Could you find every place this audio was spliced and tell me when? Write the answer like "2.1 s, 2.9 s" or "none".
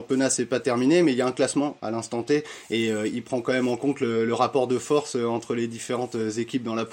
none